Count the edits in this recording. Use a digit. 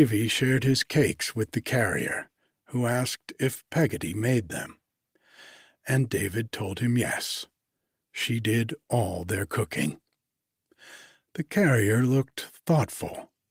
0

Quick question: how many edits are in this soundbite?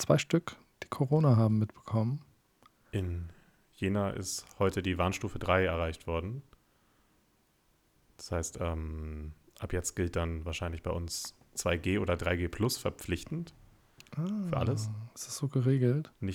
0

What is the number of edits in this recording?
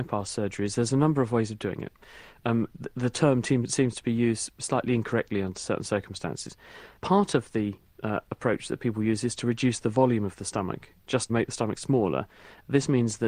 2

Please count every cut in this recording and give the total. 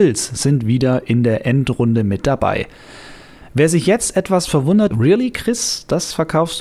1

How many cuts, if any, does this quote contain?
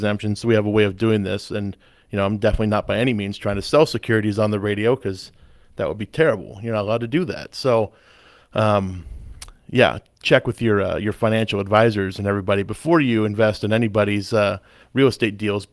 0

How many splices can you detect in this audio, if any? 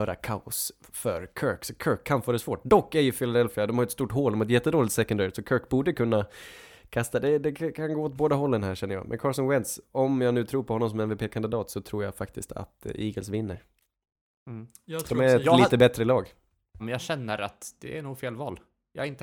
1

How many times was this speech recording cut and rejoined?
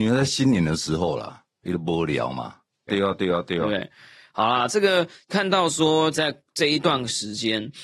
2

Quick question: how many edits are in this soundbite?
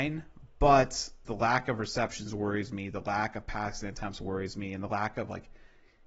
1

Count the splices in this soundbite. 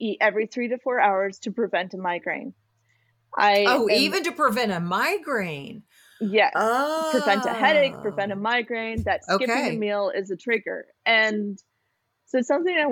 0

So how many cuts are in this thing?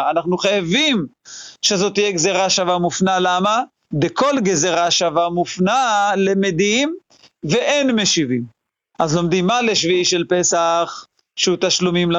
2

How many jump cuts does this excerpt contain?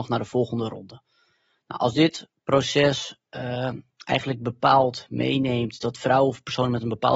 0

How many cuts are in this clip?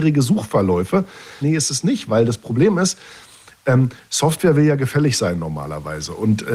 1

